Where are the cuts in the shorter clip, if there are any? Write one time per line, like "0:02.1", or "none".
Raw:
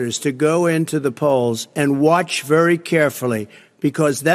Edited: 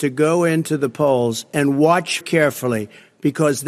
0:02.2